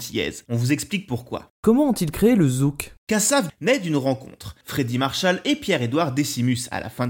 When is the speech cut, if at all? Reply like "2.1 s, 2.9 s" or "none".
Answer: 3.5 s, 4.6 s